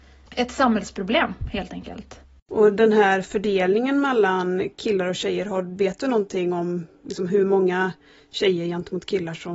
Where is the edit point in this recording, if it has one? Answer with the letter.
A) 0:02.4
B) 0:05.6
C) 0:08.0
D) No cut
D